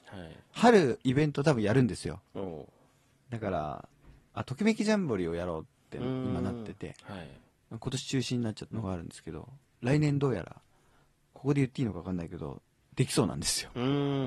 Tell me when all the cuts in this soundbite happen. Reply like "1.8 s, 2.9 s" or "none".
8.7 s